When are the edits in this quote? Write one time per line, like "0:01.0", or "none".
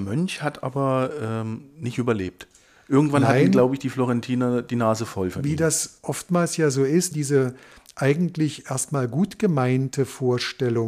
0:07.1

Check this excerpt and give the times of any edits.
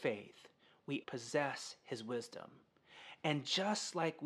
0:01.0

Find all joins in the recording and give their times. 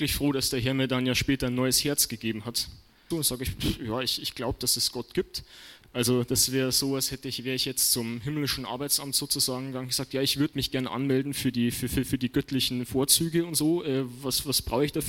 0:03.1
0:05.8

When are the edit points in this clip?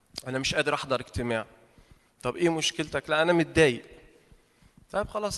none

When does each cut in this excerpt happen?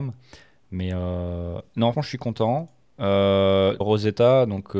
0:01.9
0:03.8

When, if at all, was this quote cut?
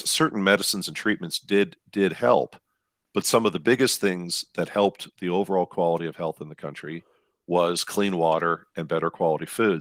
none

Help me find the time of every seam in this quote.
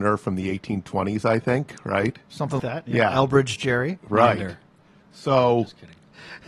0:02.6

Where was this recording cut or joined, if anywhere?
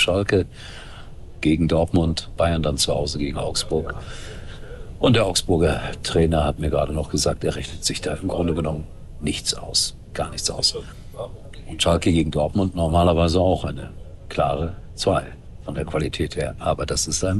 0:02.4

